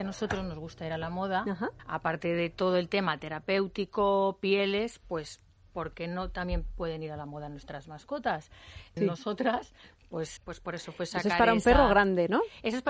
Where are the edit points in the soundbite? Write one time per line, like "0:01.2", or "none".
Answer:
0:01.8
0:09.0
0:10.4